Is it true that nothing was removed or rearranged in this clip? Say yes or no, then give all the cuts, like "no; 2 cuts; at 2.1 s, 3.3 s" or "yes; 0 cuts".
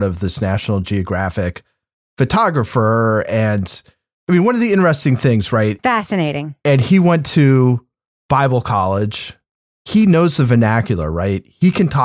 no; 1 cut; at 5.8 s